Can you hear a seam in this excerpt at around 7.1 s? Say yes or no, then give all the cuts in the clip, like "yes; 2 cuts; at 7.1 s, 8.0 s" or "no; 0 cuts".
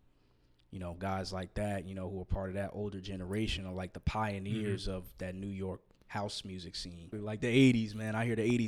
yes; 1 cut; at 7.1 s